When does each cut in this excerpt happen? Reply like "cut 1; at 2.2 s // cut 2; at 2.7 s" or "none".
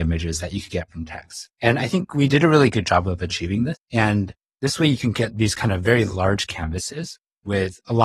cut 1; at 3.7 s

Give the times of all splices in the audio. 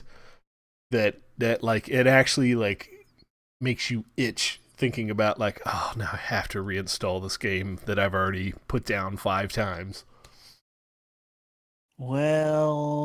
none

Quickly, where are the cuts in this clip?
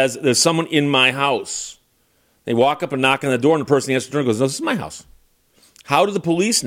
none

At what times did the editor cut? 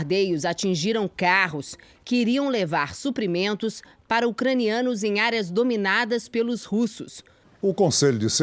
cut 1; at 7.4 s

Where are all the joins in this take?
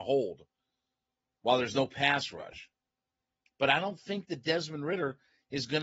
cut 1; at 3.5 s

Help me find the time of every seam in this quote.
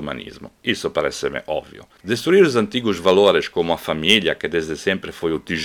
cut 1; at 2.0 s

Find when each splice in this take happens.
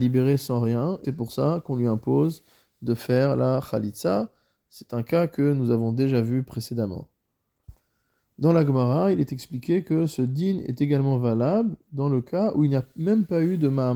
cut 1; at 1.0 s

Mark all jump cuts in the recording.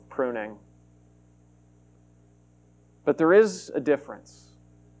none

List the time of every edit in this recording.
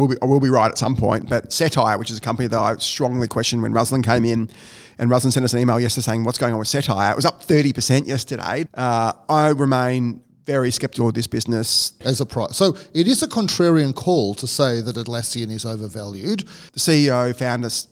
cut 1; at 8.7 s // cut 2; at 12.0 s // cut 3; at 16.7 s

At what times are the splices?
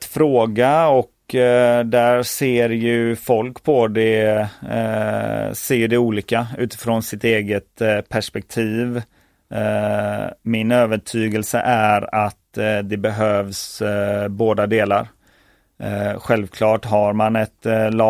none

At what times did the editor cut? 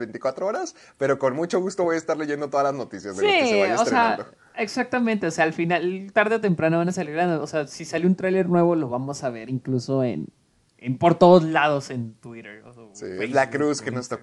none

